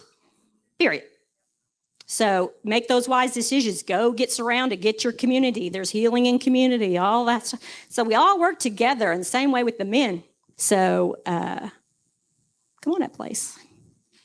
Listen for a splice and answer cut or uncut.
cut